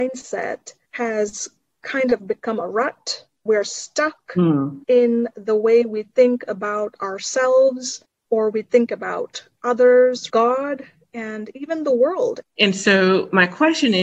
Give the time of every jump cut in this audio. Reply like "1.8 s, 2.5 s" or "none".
10.3 s, 12.4 s